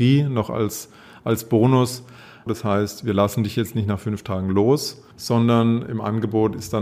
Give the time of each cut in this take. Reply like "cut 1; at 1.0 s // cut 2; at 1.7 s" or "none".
cut 1; at 2.5 s // cut 2; at 5.1 s